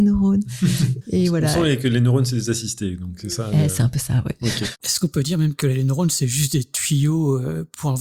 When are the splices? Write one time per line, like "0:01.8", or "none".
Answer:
0:04.7